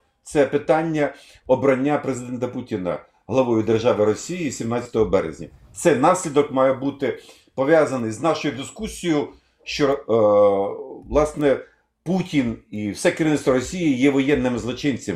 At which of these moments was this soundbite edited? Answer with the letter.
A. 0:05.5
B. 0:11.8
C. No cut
C